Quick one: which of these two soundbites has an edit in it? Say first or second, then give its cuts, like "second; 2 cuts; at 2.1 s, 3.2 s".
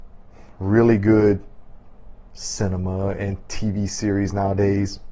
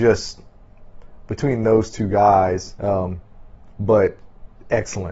second; 1 cut; at 2.8 s